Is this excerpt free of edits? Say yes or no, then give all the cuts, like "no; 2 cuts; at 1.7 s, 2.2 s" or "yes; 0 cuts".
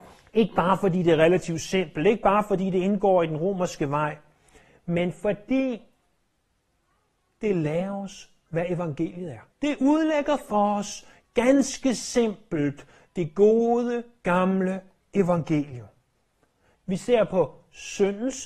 no; 2 cuts; at 9.5 s, 16.7 s